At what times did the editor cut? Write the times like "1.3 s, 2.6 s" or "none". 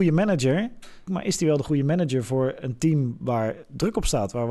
1.1 s